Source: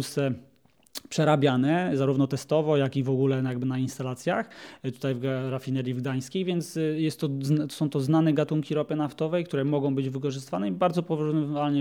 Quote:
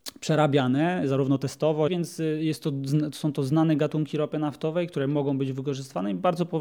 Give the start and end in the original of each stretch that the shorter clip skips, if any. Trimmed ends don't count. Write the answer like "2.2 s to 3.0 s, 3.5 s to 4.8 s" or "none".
2.8 s to 6.4 s